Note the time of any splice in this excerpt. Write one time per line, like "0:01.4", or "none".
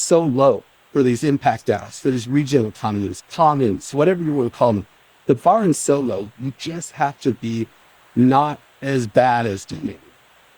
none